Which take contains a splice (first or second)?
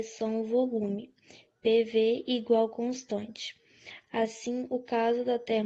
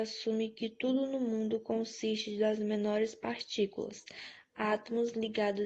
first